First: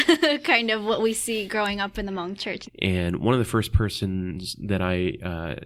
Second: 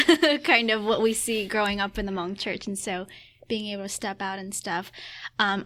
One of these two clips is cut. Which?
first; 1 cut; at 2.6 s

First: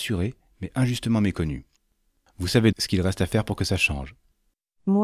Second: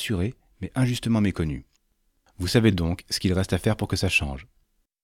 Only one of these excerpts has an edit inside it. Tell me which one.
first; 1 cut; at 2.7 s

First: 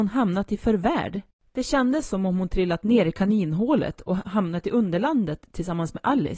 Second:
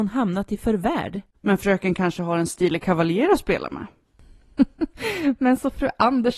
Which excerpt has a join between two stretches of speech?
second; 1 cut; at 1.3 s

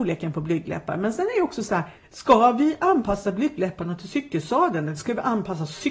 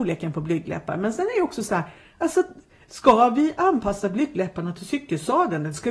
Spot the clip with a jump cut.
first; 1 cut; at 2.0 s

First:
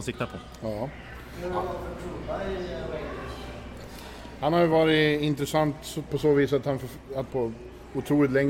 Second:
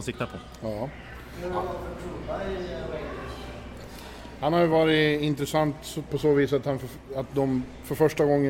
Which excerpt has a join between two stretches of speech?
first; 1 cut; at 7.3 s

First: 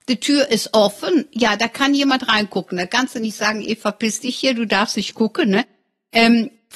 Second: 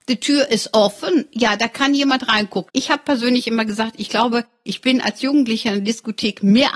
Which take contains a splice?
second; 1 cut; at 2.7 s

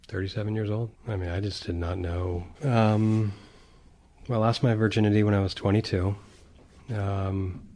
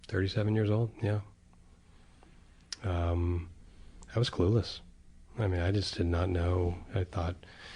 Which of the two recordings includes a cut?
first; 2 cuts; at 0.9 s, 2.5 s

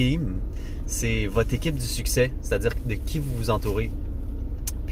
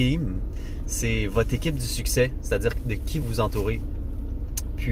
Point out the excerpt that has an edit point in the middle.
second; 1 cut; at 3.2 s

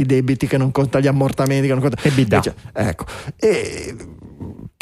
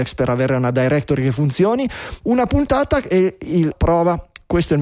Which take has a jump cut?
second; 2 cuts; at 2.2 s, 3.7 s

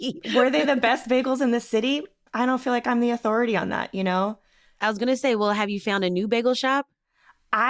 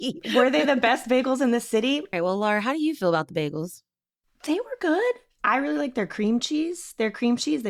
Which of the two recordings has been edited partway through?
second; 2 cuts; at 2.1 s, 5.4 s

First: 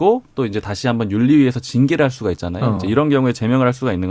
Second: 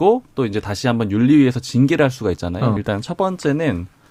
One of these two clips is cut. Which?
second; 1 cut; at 2.8 s

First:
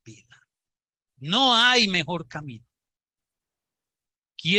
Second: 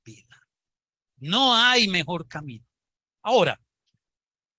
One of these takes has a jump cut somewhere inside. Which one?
second; 1 cut; at 3.2 s

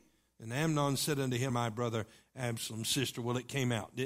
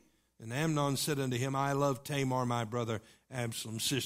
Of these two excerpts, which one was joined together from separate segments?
first; 1 cut; at 1.5 s

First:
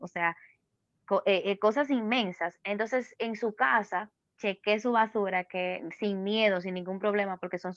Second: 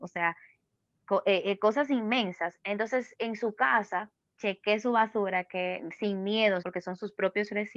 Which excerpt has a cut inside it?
second; 1 cut; at 6.6 s

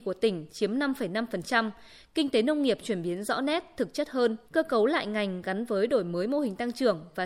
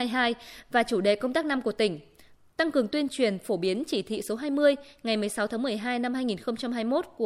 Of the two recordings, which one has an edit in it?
first; 1 cut; at 4.4 s

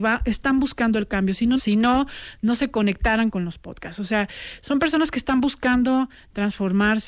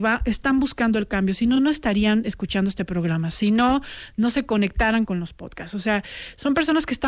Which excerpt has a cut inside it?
first; 1 cut; at 1.6 s

